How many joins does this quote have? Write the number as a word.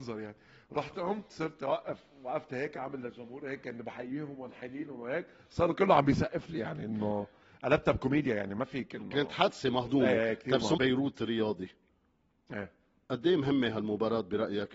one